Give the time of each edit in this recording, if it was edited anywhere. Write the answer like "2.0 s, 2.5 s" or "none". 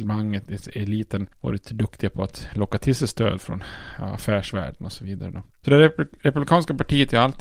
5.5 s